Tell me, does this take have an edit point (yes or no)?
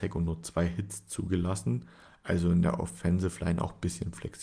yes